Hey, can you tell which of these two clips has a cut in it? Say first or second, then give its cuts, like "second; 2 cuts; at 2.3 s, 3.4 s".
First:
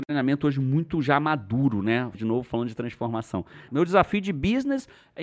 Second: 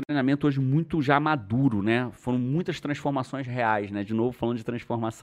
first; 2 cuts; at 2.1 s, 3.7 s